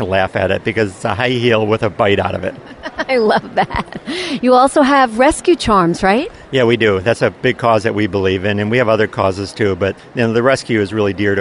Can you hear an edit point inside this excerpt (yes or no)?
no